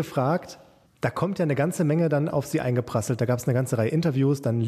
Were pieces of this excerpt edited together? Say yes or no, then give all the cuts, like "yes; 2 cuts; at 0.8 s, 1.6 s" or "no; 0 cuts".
no; 0 cuts